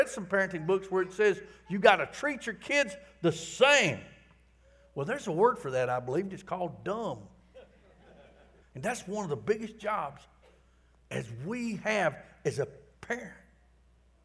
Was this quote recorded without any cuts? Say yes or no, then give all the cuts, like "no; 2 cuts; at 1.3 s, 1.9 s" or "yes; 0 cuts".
no; 1 cut; at 8.6 s